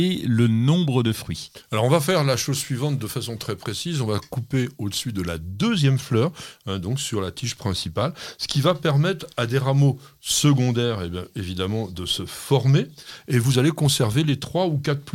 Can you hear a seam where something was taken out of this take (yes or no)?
no